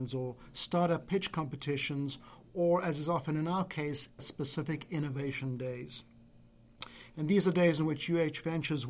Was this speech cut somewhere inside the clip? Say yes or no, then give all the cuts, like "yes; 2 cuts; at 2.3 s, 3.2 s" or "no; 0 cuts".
yes; 1 cut; at 4.2 s